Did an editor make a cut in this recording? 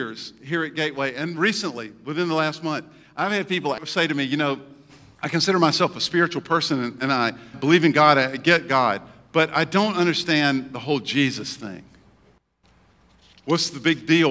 no; 0 cuts

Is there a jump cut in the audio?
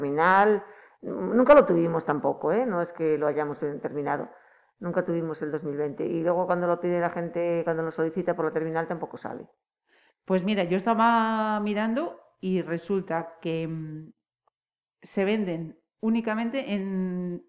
no; 0 cuts

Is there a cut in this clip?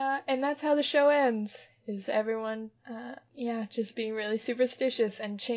no; 0 cuts

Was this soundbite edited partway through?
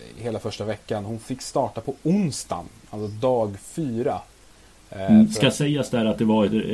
no; 0 cuts

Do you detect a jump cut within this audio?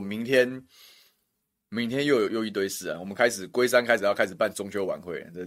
yes; 1 cut; at 2.3 s

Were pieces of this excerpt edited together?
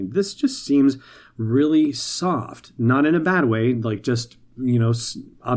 no; 0 cuts

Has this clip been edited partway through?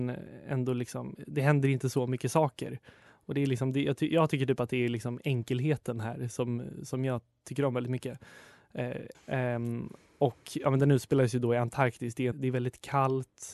yes; 2 cuts; at 9.1 s, 12.3 s

